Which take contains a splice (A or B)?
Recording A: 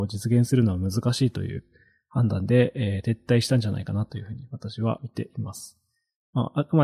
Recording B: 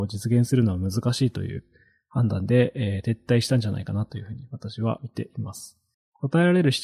B